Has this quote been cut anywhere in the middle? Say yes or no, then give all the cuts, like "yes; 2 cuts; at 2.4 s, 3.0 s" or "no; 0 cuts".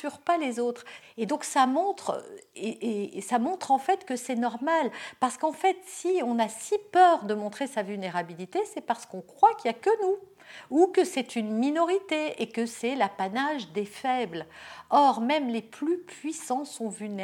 yes; 1 cut; at 1.0 s